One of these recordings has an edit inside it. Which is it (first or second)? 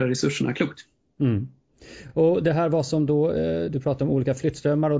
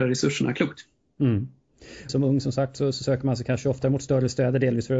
second